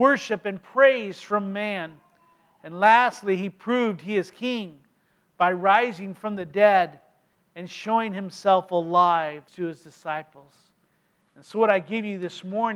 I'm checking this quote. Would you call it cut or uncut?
cut